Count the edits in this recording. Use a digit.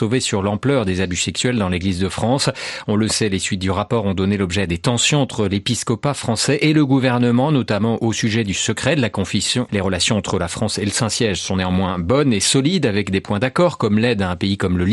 1